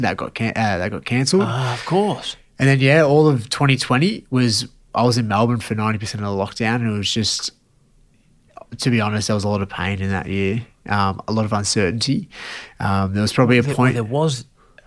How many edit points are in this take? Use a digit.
0